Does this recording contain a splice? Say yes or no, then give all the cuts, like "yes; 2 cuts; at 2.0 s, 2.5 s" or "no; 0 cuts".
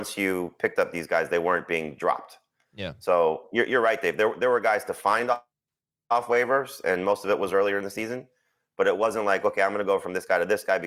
no; 0 cuts